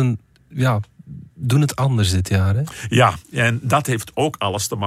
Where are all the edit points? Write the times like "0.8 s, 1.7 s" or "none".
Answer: none